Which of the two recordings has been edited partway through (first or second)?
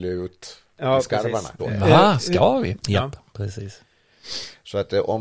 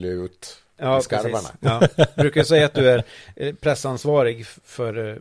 first